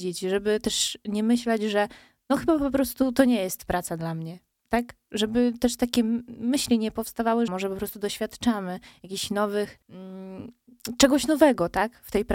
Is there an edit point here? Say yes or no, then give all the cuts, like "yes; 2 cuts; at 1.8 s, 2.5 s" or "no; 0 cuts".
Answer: yes; 2 cuts; at 7.5 s, 9.8 s